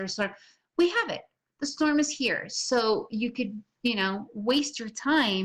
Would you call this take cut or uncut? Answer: uncut